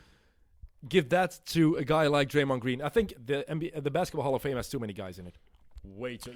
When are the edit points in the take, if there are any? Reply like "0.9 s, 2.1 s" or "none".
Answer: 3.2 s